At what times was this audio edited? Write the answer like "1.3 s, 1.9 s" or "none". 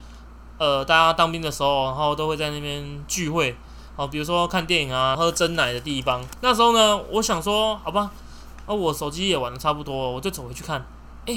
5.1 s